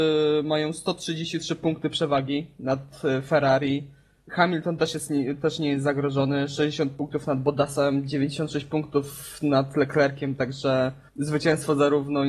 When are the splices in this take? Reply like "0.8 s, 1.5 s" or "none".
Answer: 11.1 s